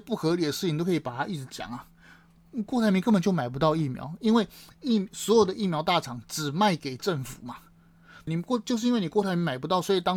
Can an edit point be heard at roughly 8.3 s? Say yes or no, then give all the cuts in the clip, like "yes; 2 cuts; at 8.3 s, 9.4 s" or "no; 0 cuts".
yes; 1 cut; at 8.3 s